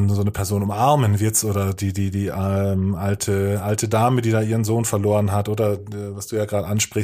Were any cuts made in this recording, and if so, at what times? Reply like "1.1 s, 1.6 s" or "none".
none